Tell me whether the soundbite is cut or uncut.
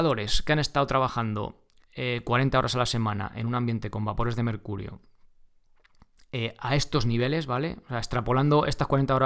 uncut